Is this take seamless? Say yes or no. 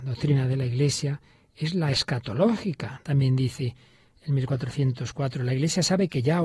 no